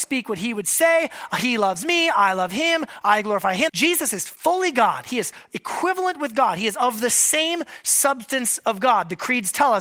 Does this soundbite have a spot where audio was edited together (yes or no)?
yes